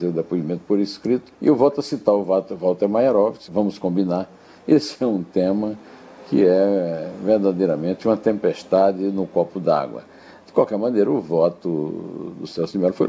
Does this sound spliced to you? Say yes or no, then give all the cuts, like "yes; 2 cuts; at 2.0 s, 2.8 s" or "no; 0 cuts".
yes; 2 cuts; at 1.3 s, 3.5 s